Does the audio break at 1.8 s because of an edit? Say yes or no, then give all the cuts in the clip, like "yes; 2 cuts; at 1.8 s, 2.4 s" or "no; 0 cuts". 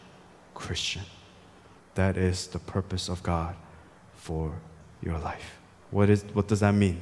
yes; 2 cuts; at 1.8 s, 5.7 s